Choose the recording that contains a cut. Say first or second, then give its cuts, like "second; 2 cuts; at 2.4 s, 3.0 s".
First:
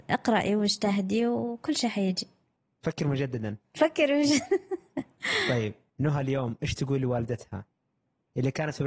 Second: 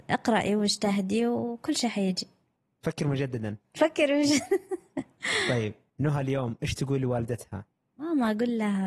second; 1 cut; at 7.9 s